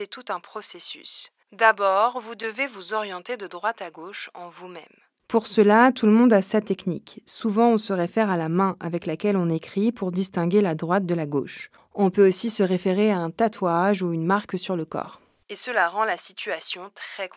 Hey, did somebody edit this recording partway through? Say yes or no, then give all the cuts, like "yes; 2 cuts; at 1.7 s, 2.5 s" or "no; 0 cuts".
yes; 1 cut; at 15.4 s